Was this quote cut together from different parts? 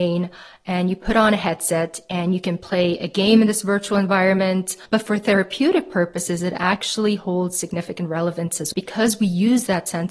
yes; 2 cuts; at 4.9 s, 8.7 s

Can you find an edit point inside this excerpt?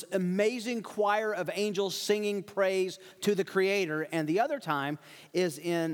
no; 0 cuts

